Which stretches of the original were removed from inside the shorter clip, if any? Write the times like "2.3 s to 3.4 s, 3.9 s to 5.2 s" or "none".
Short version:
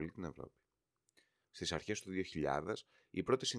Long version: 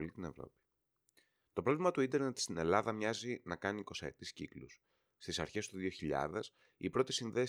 1.4 s to 5.1 s